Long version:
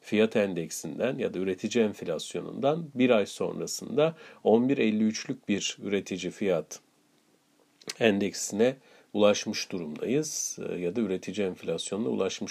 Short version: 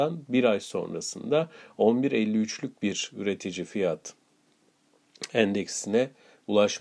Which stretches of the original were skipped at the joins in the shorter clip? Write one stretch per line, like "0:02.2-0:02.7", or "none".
none